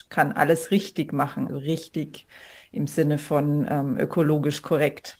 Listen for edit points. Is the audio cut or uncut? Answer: cut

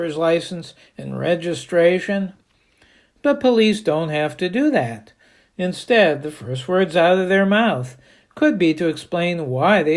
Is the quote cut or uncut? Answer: uncut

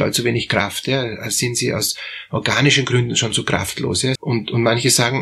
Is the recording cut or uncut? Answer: cut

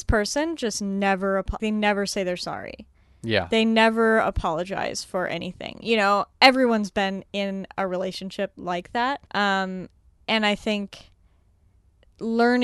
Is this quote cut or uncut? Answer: cut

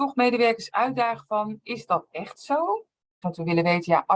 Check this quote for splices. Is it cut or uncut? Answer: cut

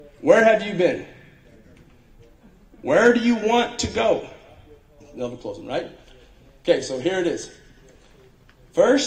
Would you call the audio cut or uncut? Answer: cut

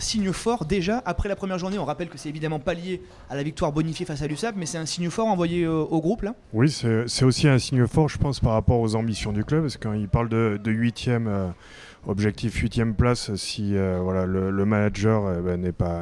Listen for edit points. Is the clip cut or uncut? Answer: cut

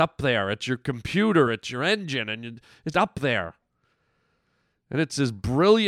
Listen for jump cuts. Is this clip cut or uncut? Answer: cut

